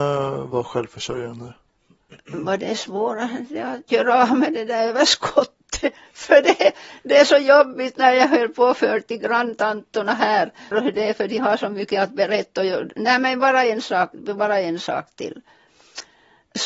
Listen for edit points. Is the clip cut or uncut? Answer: cut